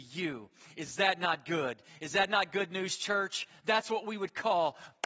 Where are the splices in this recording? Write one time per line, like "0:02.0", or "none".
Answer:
none

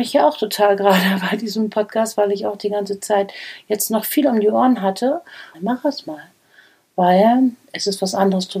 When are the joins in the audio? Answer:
0:05.5

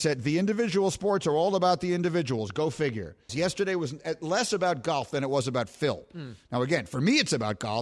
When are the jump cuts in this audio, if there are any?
0:03.3

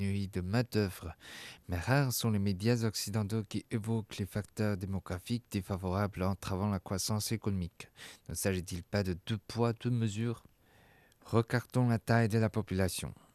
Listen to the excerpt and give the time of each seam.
none

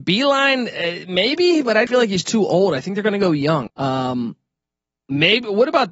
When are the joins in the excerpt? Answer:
0:01.9
0:03.7

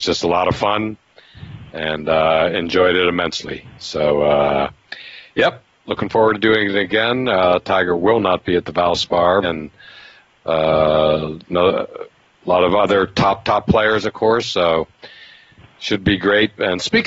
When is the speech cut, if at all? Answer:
0:09.4

